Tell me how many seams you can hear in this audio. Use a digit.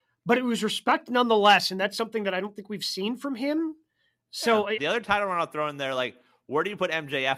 1